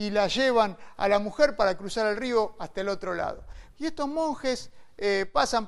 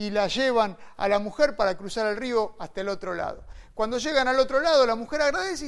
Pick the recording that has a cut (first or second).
first